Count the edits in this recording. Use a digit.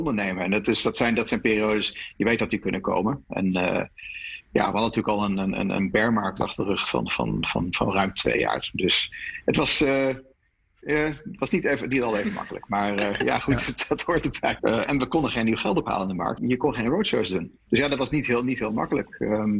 3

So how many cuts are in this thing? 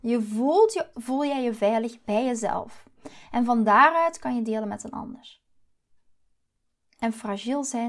1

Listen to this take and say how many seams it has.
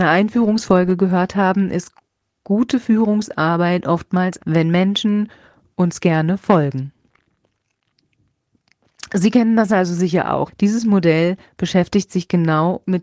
2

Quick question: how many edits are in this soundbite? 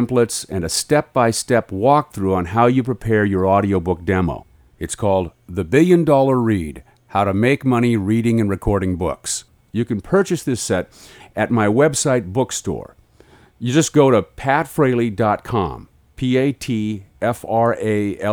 1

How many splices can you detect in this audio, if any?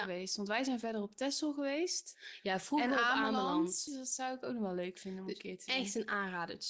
1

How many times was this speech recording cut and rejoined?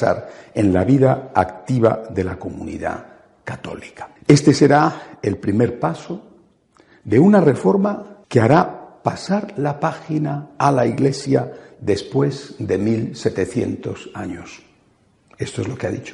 2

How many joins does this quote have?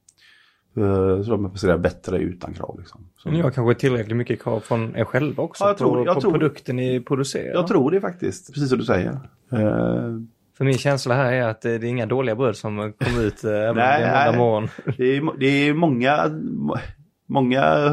1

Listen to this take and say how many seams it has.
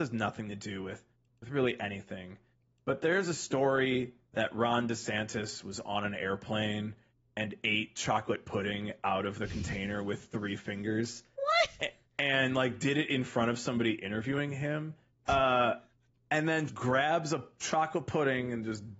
2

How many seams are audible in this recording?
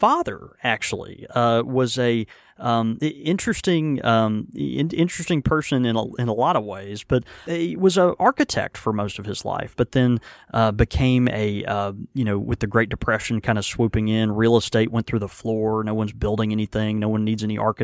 0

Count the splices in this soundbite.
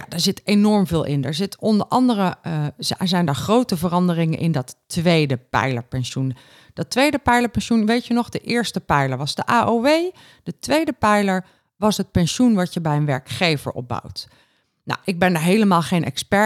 0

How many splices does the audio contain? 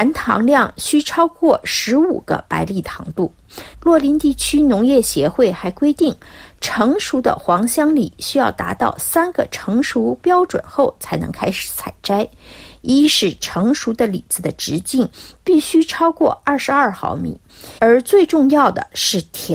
2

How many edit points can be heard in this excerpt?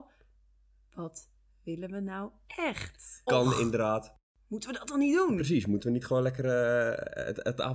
1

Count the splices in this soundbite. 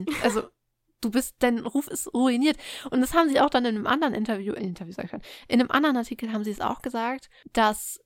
1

